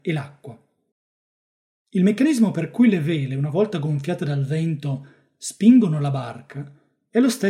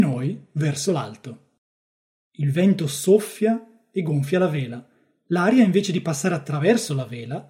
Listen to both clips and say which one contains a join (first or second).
second